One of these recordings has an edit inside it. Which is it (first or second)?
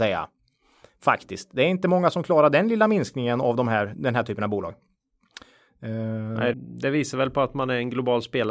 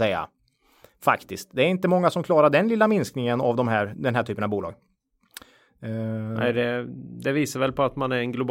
first